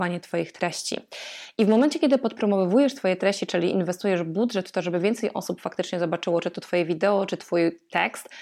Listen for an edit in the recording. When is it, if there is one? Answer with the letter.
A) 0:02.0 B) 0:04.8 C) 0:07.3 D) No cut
D